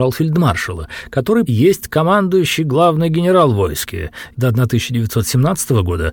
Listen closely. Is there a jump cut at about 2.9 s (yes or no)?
no